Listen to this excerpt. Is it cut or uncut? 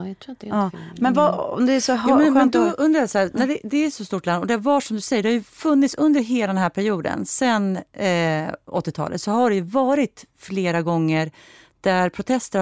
uncut